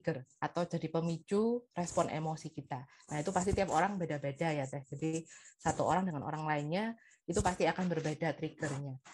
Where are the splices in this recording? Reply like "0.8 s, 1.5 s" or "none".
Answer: none